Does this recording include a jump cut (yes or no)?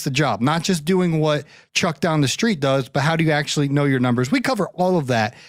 no